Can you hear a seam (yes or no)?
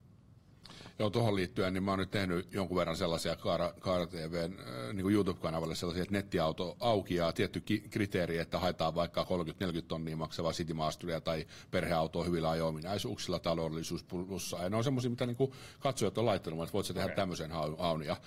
no